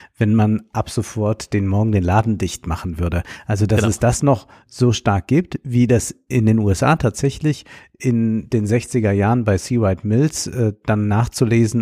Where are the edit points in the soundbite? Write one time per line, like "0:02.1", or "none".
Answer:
none

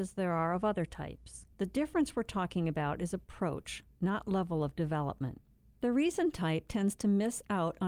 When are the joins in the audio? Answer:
0:01.5
0:05.7

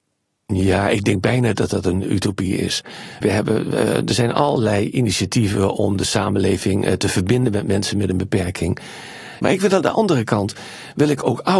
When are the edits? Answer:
0:03.2
0:09.4

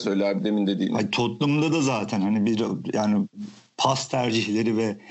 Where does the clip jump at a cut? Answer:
none

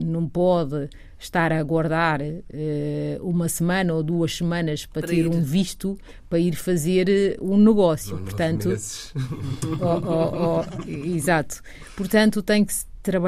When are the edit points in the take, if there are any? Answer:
none

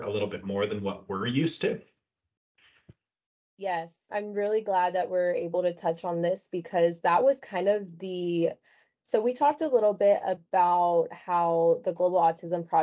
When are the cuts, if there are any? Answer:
0:04.1

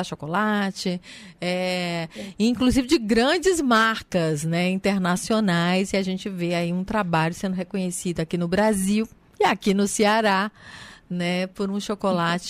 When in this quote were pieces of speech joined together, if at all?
none

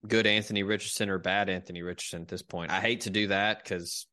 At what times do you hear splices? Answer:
none

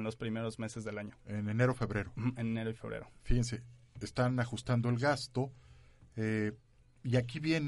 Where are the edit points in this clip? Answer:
none

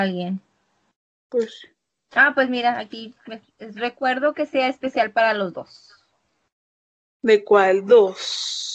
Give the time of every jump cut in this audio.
none

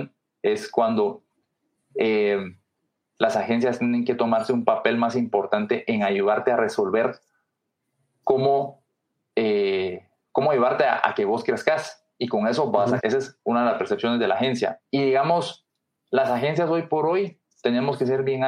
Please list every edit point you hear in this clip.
0:13.0
0:14.8

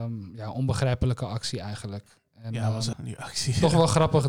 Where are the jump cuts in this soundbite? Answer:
0:02.9

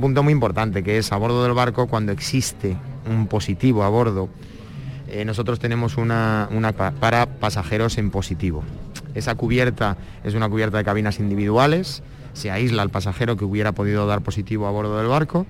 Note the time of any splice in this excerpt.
0:06.7

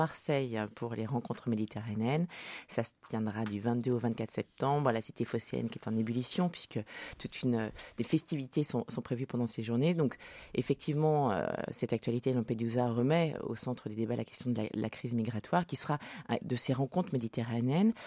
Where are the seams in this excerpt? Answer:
0:13.4
0:16.4

